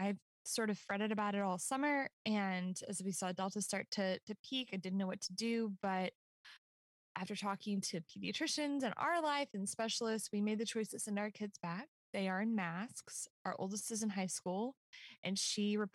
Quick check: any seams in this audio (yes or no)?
no